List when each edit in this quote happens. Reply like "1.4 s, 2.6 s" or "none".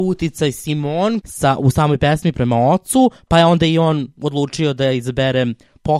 1.2 s, 2.3 s